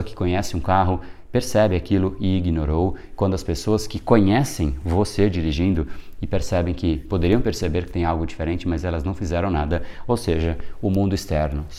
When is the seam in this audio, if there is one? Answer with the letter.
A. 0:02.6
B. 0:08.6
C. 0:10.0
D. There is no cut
D